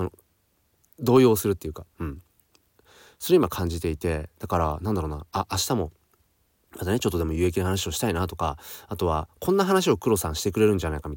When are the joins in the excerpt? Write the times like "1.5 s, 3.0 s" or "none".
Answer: none

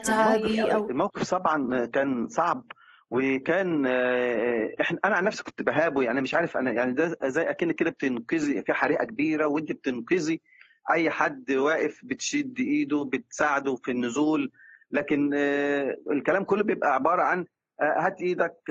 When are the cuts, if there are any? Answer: none

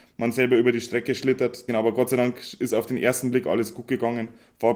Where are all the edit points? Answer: 1.7 s

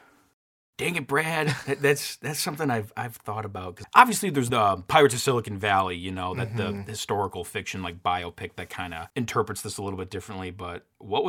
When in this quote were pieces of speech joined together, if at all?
3.8 s

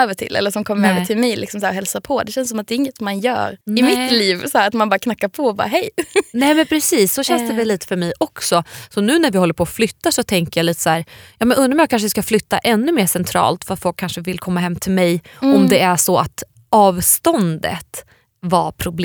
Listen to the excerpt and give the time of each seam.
3.6 s

